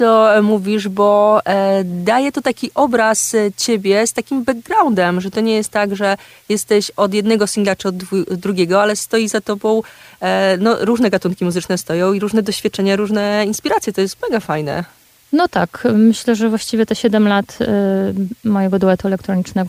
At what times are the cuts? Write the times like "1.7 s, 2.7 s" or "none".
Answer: none